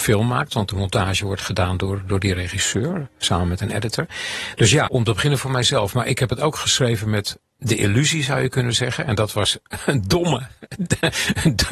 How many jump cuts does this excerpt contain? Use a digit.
1